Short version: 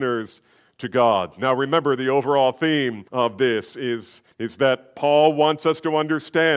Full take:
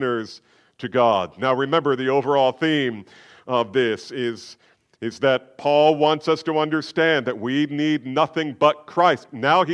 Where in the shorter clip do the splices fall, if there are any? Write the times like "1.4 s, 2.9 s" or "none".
3.1 s, 4.3 s